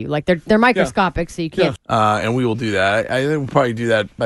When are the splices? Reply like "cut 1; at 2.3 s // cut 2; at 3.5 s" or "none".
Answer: cut 1; at 1.8 s